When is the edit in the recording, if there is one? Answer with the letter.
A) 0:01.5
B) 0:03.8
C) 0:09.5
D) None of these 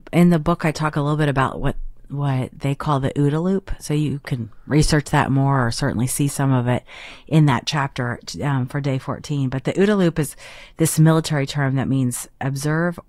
D